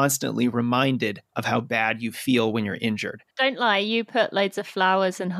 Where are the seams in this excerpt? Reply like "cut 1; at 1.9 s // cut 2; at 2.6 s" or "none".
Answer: cut 1; at 3.3 s